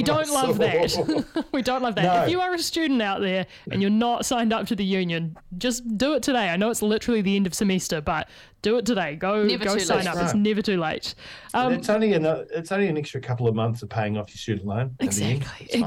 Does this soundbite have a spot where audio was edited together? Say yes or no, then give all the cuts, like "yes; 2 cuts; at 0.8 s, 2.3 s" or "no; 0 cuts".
no; 0 cuts